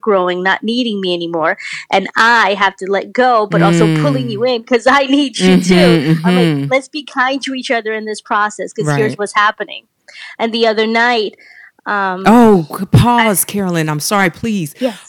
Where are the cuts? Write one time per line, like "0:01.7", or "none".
none